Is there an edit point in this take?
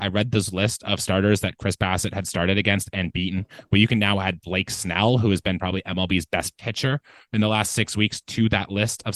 no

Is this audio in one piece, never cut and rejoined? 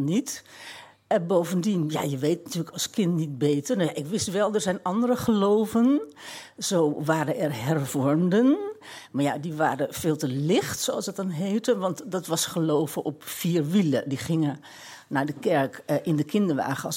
yes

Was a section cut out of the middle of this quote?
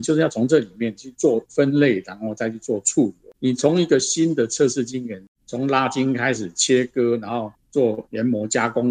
yes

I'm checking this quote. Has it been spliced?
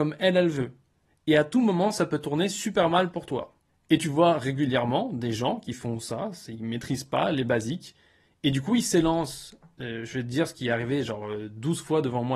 no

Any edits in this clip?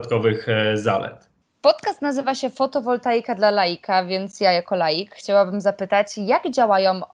no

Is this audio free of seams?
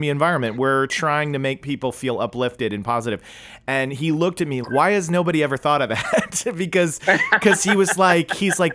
no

